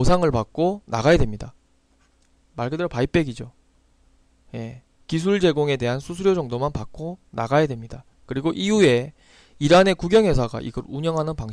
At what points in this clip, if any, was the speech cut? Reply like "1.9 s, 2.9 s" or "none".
none

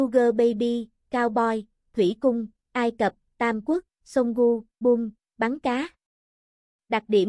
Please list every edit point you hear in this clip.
4.8 s

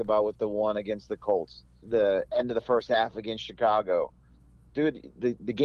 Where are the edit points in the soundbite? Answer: 1.8 s

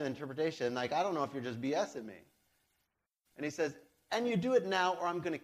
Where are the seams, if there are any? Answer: none

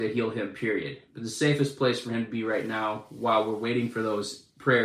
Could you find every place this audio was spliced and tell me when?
none

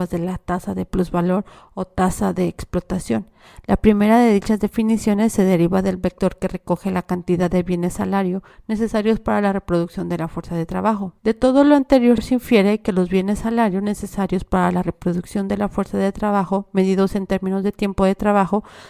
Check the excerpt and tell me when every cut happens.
11.2 s

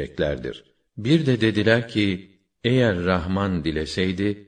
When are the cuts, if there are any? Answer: none

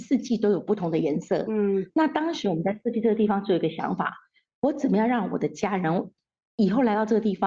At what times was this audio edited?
none

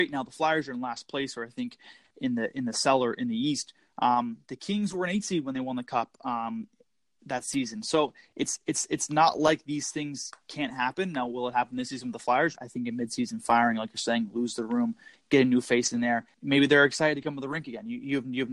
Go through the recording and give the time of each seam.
12.6 s, 16.3 s

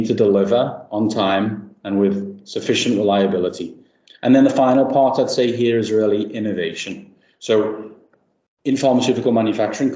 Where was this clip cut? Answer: 4.1 s

